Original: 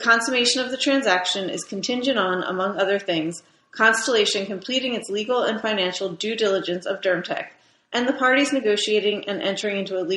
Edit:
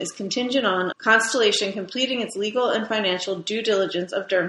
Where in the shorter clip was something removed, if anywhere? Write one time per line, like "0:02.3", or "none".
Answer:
0:00.9

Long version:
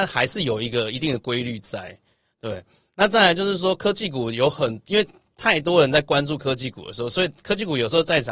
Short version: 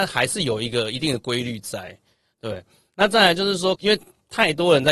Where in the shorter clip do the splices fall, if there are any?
0:03.8

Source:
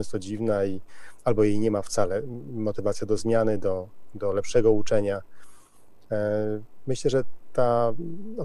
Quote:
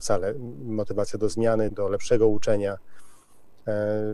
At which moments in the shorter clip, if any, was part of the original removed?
0:01.7

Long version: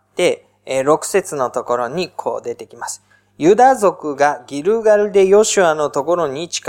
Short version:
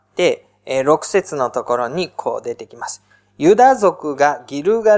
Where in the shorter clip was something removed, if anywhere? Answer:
none

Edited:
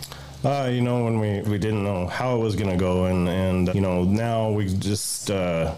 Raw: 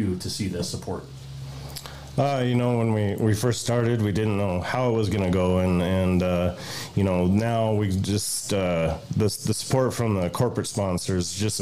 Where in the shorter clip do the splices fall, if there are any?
0:01.4
0:03.7

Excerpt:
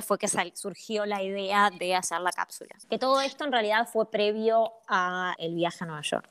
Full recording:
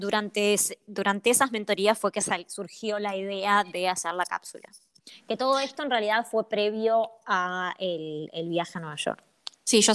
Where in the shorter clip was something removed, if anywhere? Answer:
0:02.8
0:05.4

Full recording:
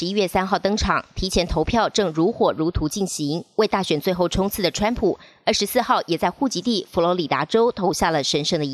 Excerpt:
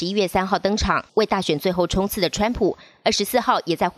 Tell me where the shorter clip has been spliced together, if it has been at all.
0:01.1

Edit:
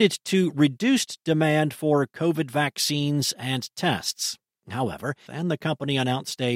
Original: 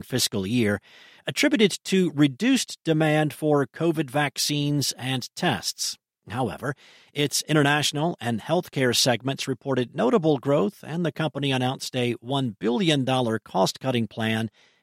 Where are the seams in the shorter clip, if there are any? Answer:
0:05.3

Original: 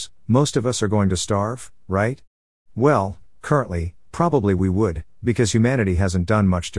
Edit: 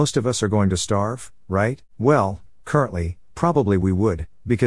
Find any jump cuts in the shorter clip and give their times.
0:01.9

